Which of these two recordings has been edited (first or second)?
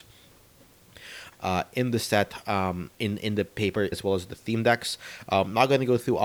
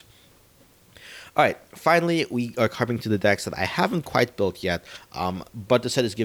first